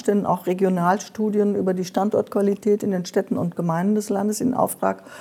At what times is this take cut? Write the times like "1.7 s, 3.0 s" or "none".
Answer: none

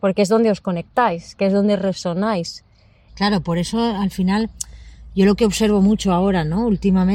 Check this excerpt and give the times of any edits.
3.1 s

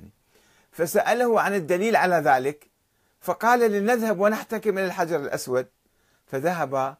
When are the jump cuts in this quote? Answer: none

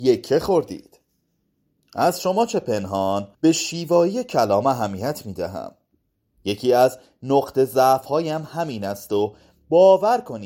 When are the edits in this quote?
3.3 s

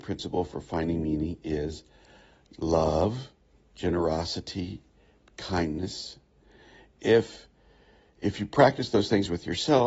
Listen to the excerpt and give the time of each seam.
none

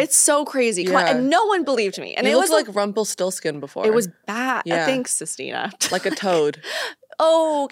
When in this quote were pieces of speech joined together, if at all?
none

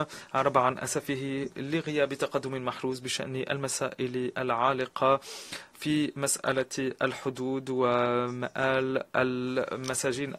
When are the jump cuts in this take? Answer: 5.7 s

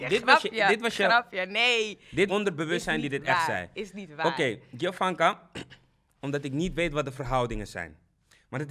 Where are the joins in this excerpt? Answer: 2.3 s, 6.2 s

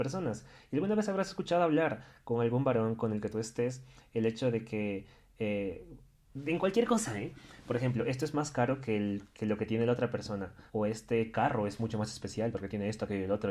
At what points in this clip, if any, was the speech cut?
10.7 s

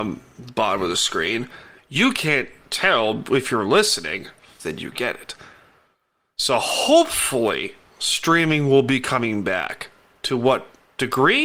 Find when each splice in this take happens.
4.6 s

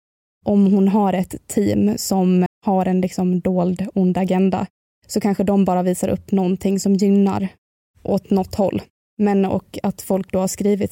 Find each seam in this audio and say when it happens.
2.5 s, 9.1 s

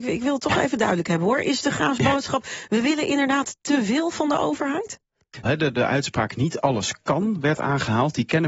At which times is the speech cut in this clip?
5.4 s

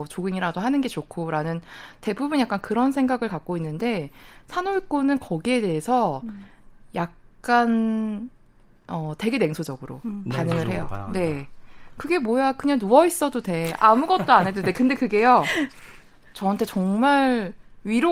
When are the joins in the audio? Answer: none

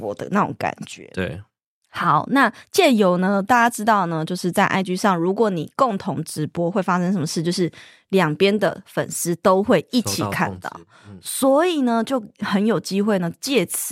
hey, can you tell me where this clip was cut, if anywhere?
none

